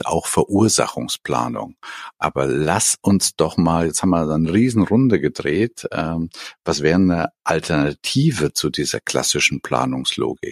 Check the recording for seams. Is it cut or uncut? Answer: cut